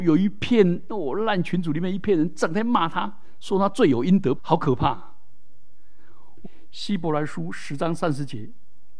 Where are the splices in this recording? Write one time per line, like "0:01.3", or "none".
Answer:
0:04.4
0:06.4